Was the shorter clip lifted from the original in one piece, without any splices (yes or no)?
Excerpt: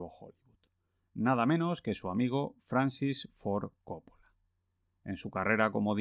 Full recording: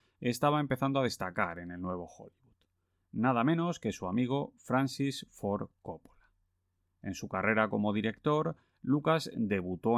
yes